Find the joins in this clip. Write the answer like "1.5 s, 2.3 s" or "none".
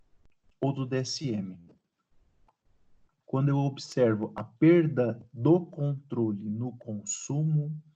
3.2 s

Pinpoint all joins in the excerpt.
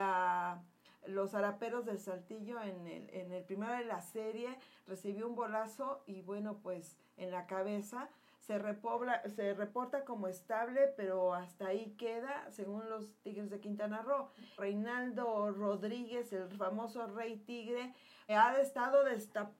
14.6 s, 18.3 s

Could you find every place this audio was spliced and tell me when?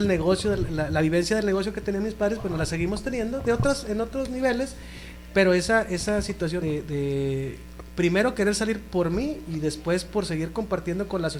6.6 s

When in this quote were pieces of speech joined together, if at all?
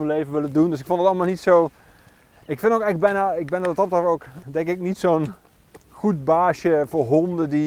4.4 s

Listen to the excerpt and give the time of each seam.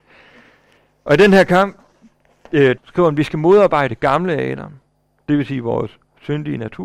2.8 s

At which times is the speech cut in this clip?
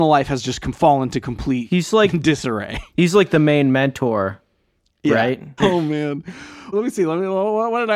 5.6 s, 6.7 s

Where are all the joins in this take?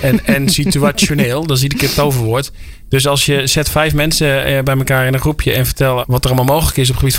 6.0 s

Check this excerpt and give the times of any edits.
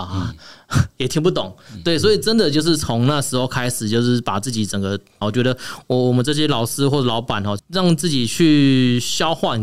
5.2 s, 7.6 s

